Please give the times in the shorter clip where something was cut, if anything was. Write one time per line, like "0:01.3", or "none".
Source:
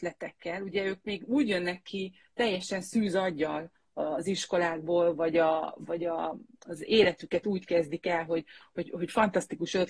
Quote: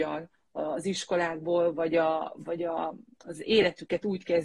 none